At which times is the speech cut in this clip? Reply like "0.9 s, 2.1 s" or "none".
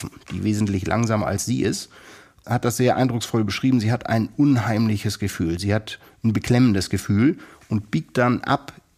2.4 s